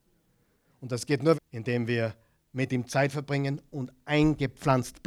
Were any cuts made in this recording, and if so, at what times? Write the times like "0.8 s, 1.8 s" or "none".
1.3 s